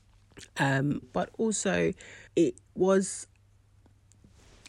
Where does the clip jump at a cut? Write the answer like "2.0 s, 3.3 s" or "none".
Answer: 1.0 s, 2.3 s